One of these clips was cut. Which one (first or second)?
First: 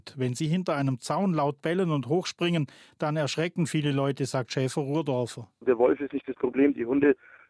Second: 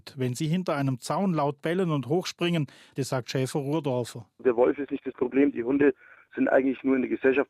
second